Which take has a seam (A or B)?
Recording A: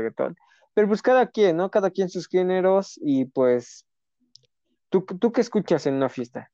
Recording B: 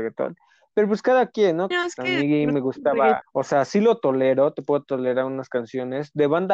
B